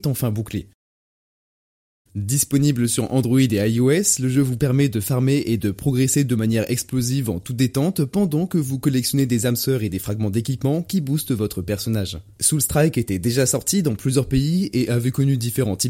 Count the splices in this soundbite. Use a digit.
1